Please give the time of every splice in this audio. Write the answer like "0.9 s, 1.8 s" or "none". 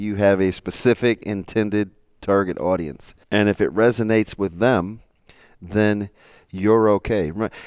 3.2 s